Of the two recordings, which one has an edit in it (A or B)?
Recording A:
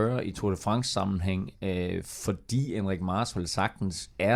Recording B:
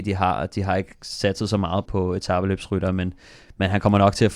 B